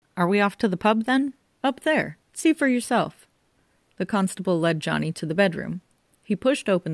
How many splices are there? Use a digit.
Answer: 1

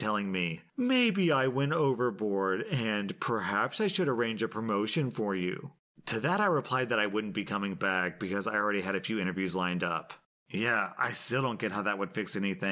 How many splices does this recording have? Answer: 1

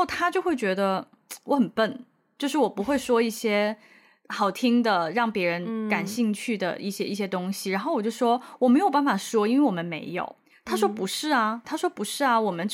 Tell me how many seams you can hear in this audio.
1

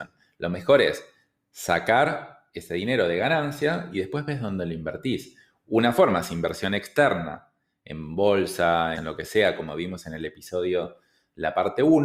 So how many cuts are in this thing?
1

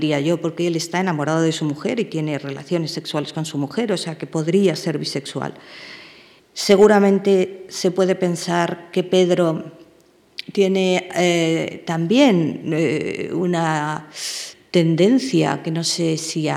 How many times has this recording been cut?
1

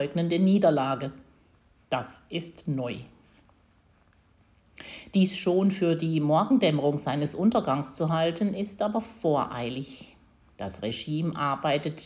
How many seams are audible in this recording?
0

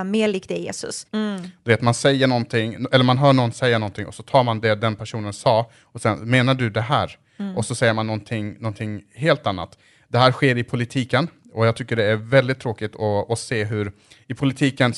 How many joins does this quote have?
1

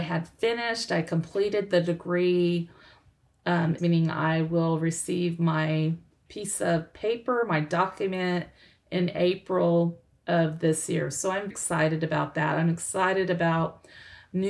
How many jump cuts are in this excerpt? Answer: 2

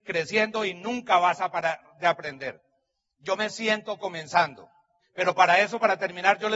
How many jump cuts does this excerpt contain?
1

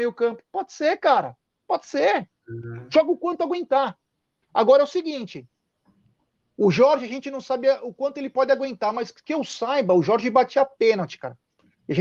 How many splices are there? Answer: 0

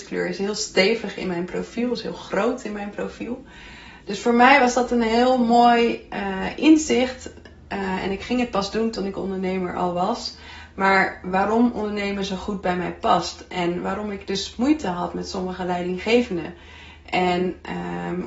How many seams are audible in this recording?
1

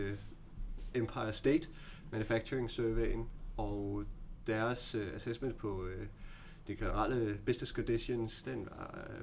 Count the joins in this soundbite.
1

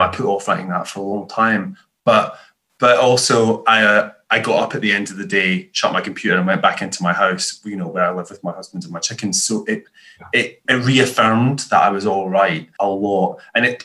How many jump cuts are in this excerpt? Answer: 2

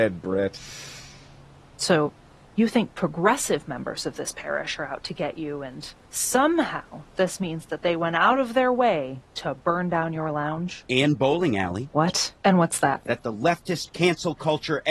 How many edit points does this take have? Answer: 2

